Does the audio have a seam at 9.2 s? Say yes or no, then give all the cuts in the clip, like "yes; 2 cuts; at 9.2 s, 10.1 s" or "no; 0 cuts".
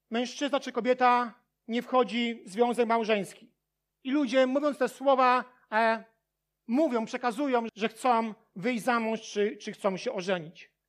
no; 2 cuts; at 3.9 s, 7.7 s